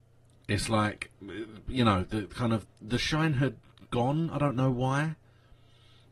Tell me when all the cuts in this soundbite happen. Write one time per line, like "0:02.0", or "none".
0:02.7